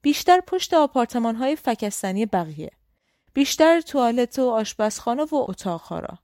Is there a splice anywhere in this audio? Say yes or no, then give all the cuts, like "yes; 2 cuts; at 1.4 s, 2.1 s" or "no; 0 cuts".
no; 0 cuts